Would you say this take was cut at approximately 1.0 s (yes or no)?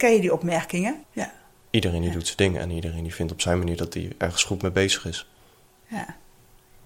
yes